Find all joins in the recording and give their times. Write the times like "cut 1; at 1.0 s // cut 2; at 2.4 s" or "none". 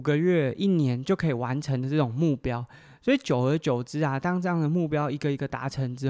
none

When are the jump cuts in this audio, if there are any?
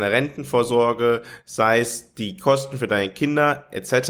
none

